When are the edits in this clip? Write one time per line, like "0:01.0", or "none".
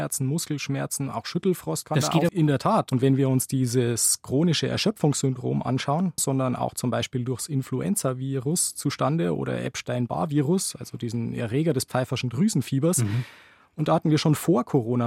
0:02.3
0:06.2